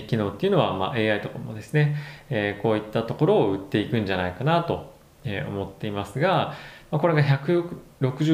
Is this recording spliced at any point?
no; 0 cuts

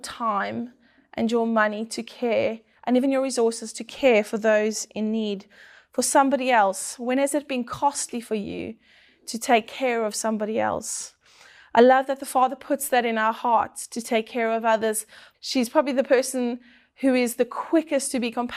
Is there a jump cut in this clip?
yes; 1 cut; at 15.3 s

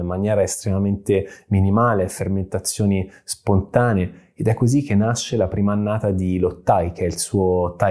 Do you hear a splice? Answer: no; 0 cuts

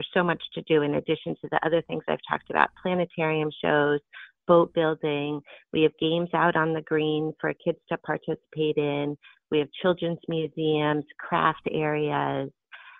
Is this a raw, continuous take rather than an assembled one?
yes; 0 cuts

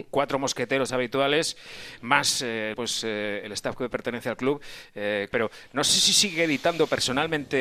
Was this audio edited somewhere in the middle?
yes; 2 cuts; at 2.7 s, 5.3 s

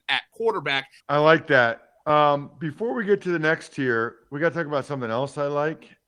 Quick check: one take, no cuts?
no; 1 cut; at 1.0 s

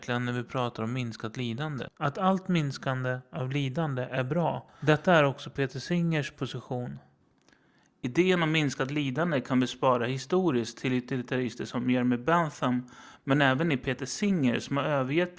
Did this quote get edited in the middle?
no; 0 cuts

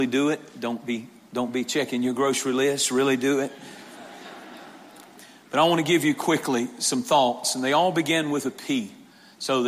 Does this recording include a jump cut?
no; 0 cuts

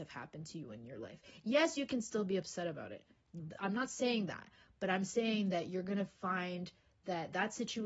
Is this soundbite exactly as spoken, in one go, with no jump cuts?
yes; 0 cuts

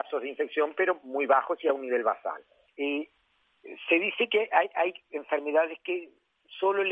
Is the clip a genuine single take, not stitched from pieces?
no; 1 cut; at 2.7 s

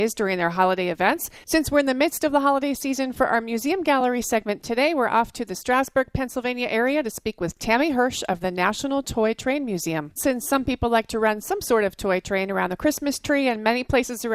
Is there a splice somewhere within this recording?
yes; 1 cut; at 10.2 s

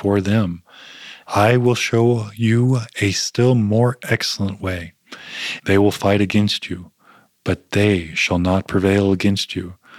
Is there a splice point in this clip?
yes; 2 cuts; at 1.2 s, 5.6 s

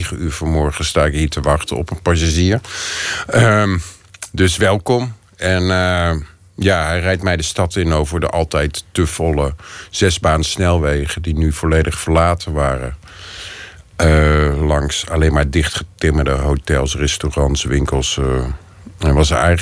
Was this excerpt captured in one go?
yes; 0 cuts

